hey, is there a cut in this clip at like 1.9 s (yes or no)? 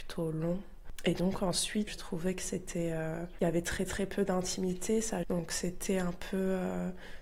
yes